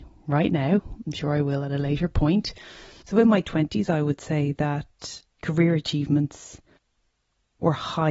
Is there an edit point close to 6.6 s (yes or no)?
no